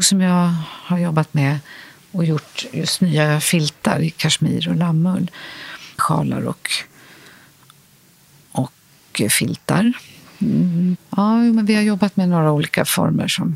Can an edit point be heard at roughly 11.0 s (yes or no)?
yes